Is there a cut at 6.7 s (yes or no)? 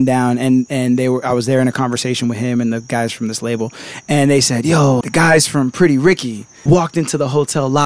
yes